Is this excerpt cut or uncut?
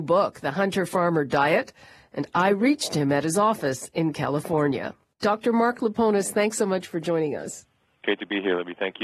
uncut